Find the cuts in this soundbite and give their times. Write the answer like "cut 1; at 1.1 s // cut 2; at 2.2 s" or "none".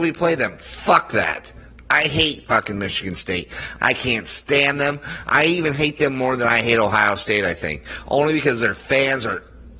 cut 1; at 3.8 s